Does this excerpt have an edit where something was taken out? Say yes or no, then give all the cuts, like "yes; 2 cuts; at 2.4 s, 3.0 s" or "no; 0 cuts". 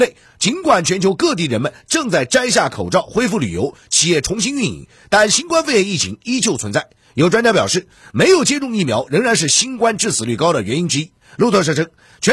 no; 0 cuts